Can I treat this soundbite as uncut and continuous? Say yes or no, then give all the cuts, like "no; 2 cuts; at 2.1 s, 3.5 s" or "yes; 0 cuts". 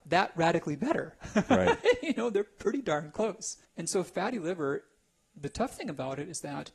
no; 1 cut; at 3.7 s